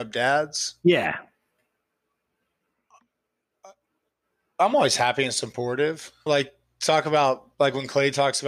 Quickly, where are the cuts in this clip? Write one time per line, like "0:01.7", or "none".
0:06.3